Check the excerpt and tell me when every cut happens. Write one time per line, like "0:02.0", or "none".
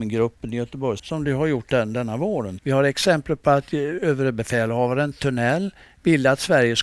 0:01.0
0:02.6